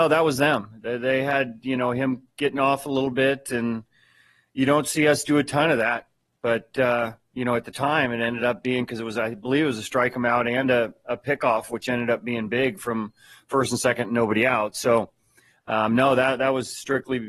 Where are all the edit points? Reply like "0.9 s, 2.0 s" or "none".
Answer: none